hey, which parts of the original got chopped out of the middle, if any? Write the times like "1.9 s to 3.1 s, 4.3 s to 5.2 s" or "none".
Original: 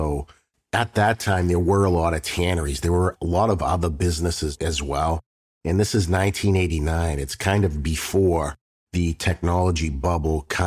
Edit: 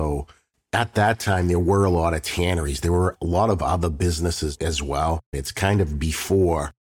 5.3 s to 7.2 s